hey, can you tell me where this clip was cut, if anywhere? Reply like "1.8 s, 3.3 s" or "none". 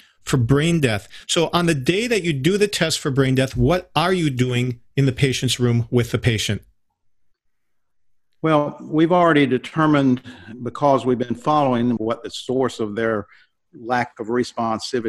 12.0 s